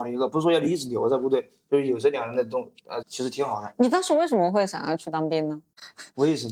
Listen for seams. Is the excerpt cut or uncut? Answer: cut